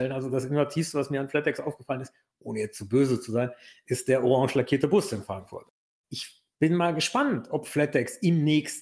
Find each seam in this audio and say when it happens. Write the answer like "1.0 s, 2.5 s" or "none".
none

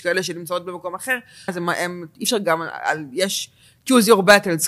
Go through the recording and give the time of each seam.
1.5 s

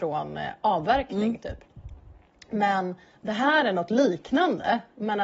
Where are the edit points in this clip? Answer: none

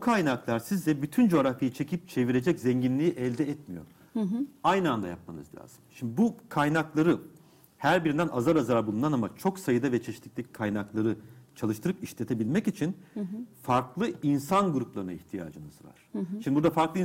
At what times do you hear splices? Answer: none

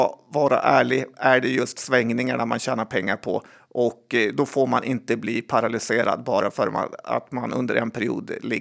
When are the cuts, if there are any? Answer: none

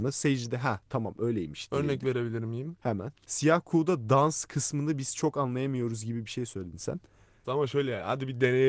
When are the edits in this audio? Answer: 3.2 s, 7.4 s

